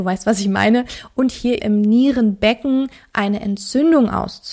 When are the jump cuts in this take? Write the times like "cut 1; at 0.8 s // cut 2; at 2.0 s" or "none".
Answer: cut 1; at 1.6 s